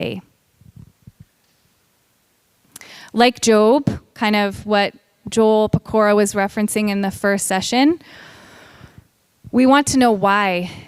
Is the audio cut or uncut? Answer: uncut